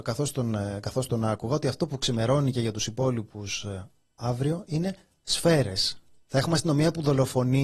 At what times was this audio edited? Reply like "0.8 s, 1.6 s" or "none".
6.2 s